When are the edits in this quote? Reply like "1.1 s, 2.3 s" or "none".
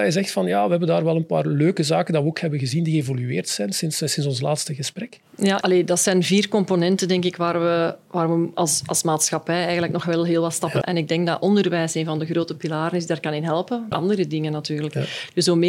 5.6 s, 10.8 s, 13.9 s